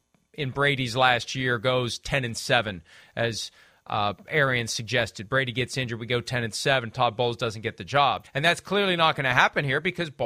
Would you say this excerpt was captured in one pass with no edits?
no; 1 cut; at 8.2 s

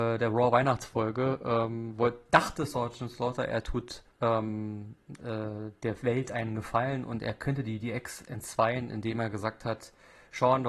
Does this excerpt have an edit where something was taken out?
yes; 1 cut; at 4.1 s

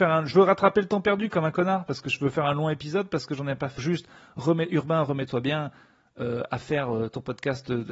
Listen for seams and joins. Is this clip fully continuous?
no; 1 cut; at 3.8 s

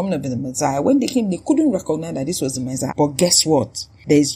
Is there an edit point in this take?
yes; 1 cut; at 2.9 s

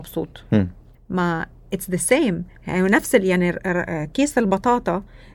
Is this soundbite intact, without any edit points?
no; 1 cut; at 0.9 s

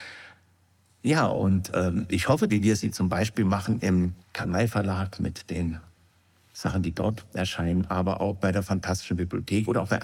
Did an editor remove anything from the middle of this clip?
yes; 2 cuts; at 2.5 s, 4.2 s

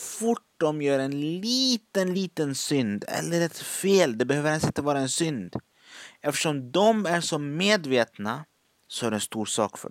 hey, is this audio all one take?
yes; 0 cuts

